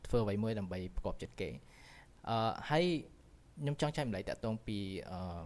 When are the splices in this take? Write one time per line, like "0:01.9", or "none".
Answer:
none